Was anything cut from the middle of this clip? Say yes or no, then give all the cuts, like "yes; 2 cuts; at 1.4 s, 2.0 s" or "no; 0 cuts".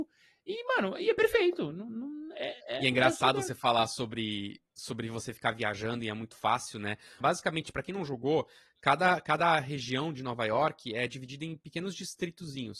yes; 1 cut; at 7.2 s